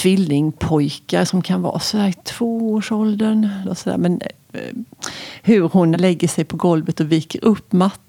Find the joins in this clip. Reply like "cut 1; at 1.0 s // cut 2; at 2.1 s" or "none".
cut 1; at 3.6 s // cut 2; at 5.9 s